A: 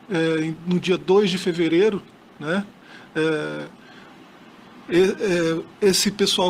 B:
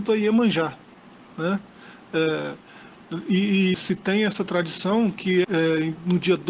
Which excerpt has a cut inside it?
B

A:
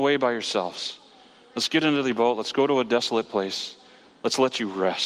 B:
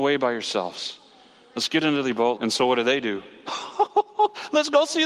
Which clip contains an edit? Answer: B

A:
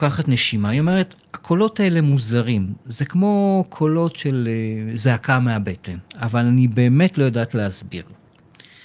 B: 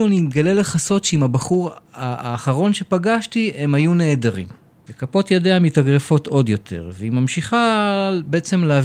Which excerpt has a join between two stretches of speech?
B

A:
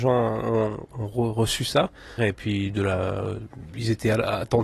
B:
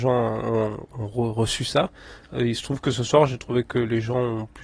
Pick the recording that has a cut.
A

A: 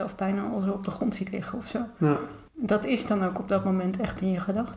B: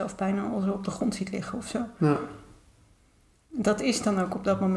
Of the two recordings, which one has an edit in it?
A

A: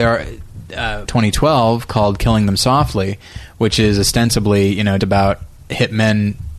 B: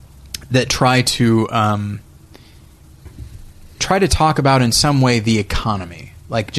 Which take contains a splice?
A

